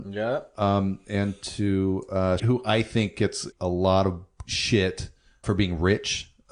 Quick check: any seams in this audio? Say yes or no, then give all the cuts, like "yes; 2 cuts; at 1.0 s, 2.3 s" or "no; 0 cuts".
yes; 3 cuts; at 2.4 s, 3.5 s, 5.4 s